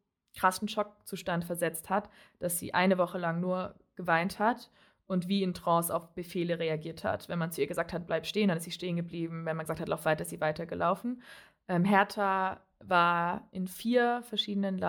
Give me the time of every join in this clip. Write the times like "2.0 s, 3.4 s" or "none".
none